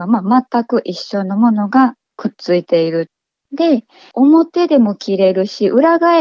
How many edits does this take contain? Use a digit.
0